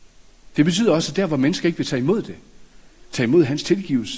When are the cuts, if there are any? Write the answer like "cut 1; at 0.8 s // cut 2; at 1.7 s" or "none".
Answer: none